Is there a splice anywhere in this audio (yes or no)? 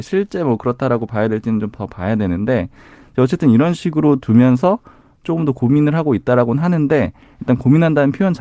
no